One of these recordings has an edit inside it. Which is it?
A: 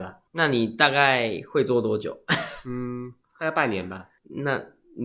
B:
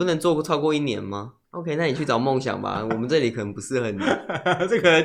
B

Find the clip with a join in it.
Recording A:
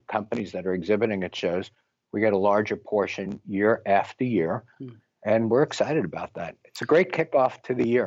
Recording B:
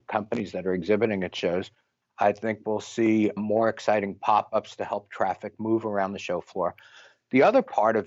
B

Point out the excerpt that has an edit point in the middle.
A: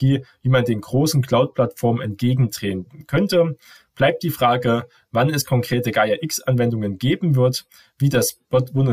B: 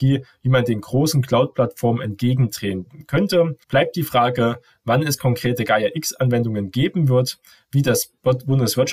B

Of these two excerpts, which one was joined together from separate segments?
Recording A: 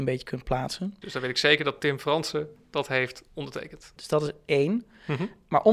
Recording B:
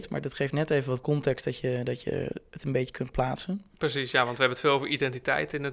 A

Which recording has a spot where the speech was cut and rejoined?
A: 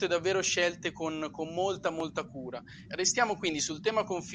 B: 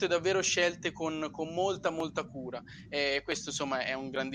A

